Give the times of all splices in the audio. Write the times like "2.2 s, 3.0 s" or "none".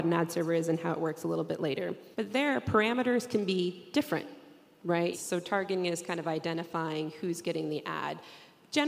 2.1 s, 5.1 s